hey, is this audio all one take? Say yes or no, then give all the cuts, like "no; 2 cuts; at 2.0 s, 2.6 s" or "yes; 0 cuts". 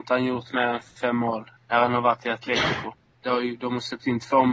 no; 2 cuts; at 1.6 s, 3.1 s